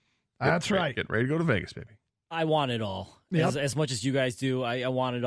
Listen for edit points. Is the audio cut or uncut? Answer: uncut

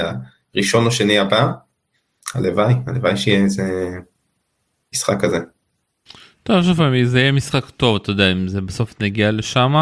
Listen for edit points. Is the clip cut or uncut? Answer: uncut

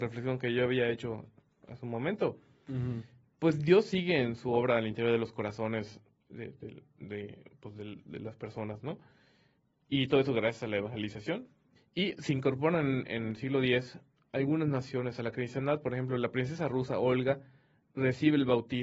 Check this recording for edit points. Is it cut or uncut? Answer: cut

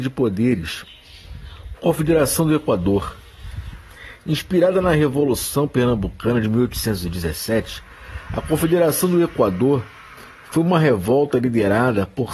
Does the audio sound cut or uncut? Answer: cut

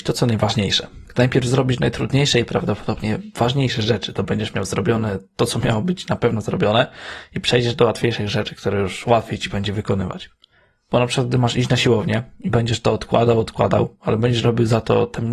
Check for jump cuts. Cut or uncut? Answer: uncut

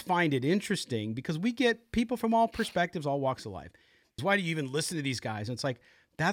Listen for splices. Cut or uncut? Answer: cut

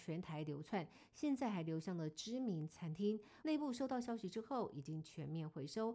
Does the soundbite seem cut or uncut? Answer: cut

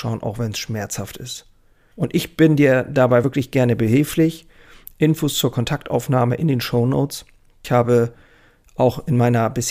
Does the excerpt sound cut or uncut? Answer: uncut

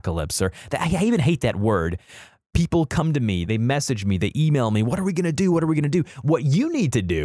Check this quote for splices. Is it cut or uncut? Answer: cut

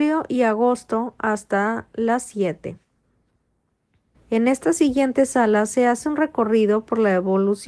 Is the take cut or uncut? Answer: cut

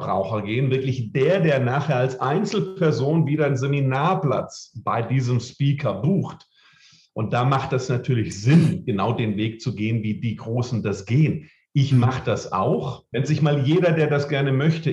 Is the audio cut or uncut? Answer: cut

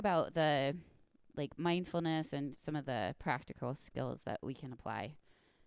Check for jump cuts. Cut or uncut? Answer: uncut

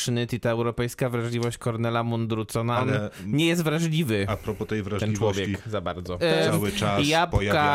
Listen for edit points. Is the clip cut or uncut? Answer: cut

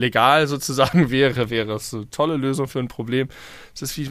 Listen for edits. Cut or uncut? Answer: uncut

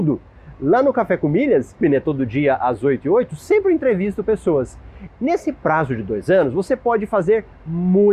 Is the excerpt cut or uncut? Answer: cut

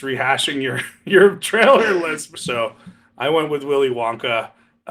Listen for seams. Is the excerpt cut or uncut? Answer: cut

